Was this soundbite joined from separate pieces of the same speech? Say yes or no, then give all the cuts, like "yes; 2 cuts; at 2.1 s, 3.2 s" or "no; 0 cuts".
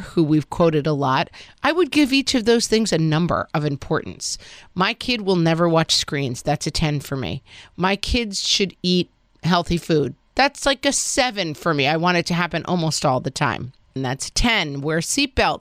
yes; 1 cut; at 14.0 s